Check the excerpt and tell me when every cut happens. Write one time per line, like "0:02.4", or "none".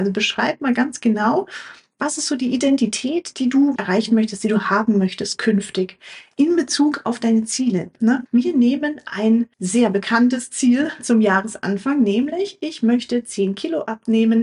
0:03.8
0:08.3
0:09.5